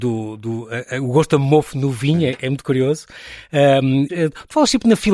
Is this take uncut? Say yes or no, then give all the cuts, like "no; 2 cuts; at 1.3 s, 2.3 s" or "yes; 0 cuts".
no; 1 cut; at 4.1 s